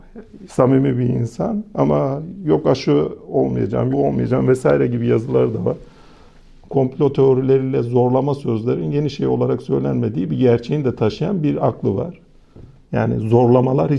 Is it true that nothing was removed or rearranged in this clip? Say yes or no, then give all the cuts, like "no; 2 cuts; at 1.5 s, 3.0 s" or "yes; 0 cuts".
no; 1 cut; at 3.9 s